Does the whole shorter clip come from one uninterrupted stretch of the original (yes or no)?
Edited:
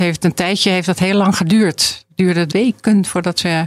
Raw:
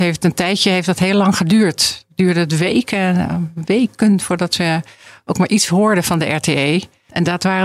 no